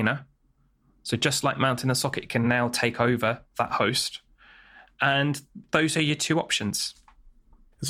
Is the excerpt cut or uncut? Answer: uncut